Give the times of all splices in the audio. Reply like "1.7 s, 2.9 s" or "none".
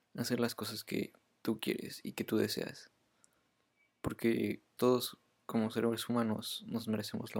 4.8 s